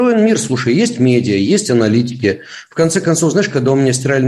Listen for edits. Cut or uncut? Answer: uncut